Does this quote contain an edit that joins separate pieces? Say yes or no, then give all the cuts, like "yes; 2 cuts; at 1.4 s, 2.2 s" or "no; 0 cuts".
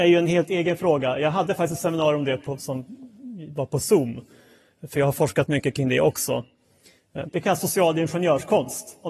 yes; 2 cuts; at 2.6 s, 7.3 s